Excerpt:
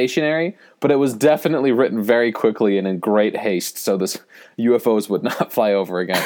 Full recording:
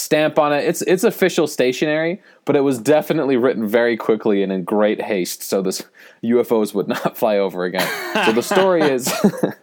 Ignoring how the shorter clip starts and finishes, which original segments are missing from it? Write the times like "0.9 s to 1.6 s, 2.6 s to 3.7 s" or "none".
none